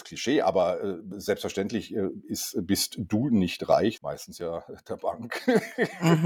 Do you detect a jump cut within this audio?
yes; 1 cut; at 4.0 s

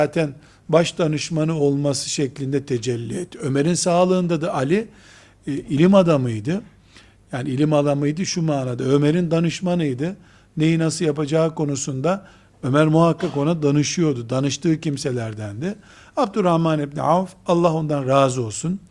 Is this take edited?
no; 0 cuts

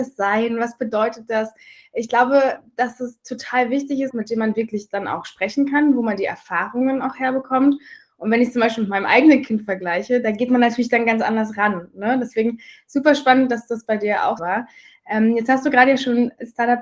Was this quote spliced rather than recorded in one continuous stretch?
yes; 2 cuts; at 4.1 s, 14.4 s

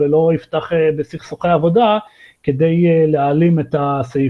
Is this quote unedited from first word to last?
yes; 0 cuts

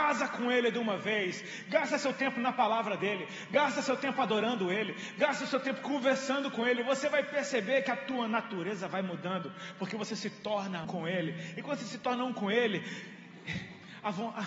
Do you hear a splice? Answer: yes; 1 cut; at 10.8 s

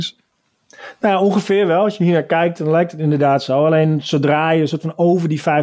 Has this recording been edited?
no; 0 cuts

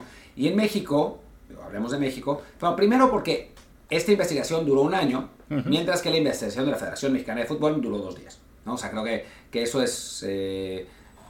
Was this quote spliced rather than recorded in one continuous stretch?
no; 0 cuts

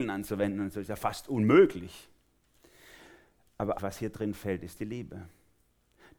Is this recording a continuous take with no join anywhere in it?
no; 1 cut; at 3.8 s

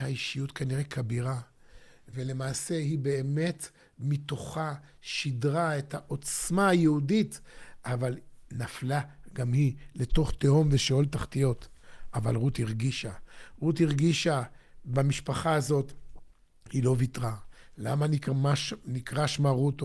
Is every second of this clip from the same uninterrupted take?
yes; 0 cuts

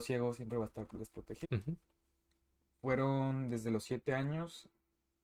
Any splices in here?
yes; 1 cut; at 1.4 s

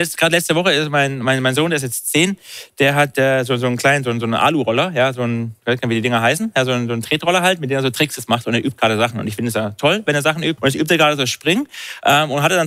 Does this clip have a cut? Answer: yes; 1 cut; at 10.6 s

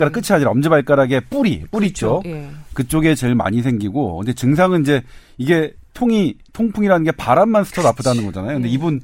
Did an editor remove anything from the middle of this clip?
no; 0 cuts

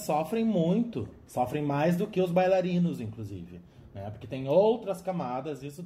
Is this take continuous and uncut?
yes; 0 cuts

